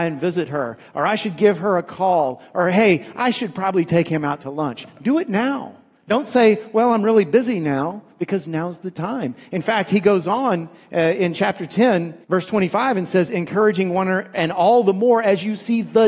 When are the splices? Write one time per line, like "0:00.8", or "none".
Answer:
0:12.2
0:14.3